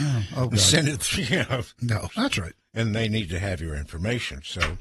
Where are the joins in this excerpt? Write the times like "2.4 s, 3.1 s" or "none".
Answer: 2.1 s